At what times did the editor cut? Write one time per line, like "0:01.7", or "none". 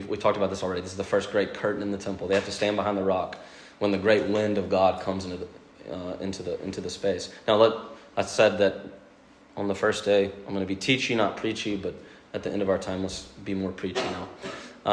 none